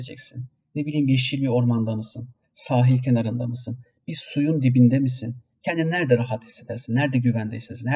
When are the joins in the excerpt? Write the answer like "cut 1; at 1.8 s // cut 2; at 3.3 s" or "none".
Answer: cut 1; at 5.5 s